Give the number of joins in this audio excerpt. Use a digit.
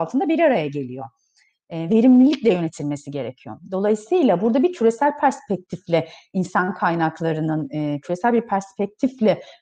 1